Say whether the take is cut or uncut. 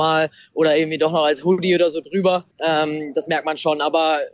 cut